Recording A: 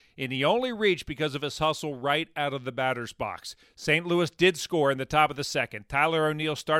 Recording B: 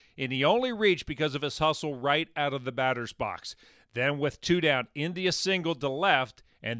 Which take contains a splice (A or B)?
A